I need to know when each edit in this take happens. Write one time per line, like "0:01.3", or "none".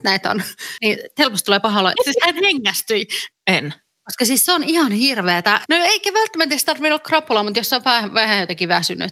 0:01.9
0:03.3
0:05.6